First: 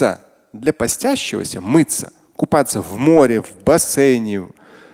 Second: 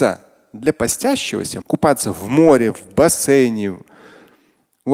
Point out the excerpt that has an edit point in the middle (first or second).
second